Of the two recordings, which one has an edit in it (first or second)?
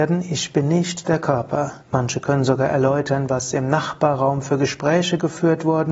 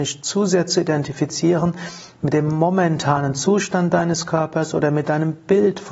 first